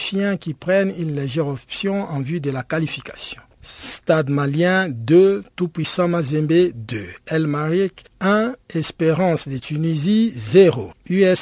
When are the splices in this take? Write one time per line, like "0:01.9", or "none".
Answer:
0:03.5